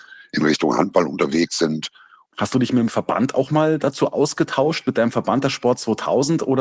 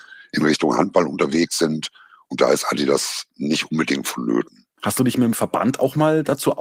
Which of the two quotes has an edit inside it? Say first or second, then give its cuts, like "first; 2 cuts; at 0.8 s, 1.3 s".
first; 1 cut; at 2.3 s